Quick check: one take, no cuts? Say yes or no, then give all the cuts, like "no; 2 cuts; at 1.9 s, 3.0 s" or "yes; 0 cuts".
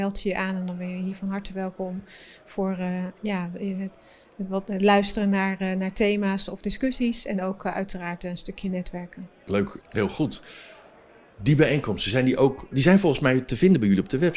no; 2 cuts; at 9.8 s, 12.7 s